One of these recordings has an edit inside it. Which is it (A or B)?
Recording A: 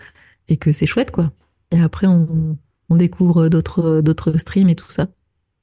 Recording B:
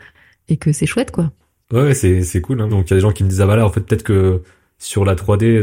B